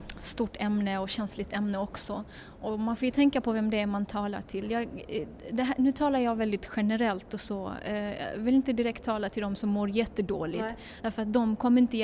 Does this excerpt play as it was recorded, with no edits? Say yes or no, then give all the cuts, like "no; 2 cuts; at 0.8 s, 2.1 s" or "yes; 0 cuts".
yes; 0 cuts